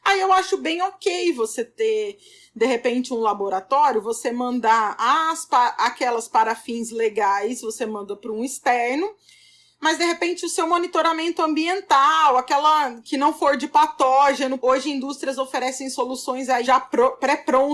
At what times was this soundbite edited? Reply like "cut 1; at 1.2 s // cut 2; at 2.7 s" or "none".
cut 1; at 13.0 s // cut 2; at 14.6 s // cut 3; at 16.6 s